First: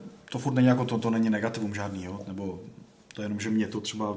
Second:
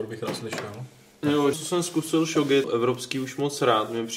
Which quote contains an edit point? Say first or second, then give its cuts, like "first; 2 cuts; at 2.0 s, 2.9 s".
second; 2 cuts; at 1.5 s, 2.6 s